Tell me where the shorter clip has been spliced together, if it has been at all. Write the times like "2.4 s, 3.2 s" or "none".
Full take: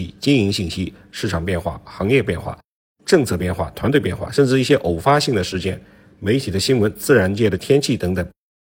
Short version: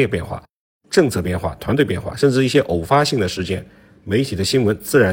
none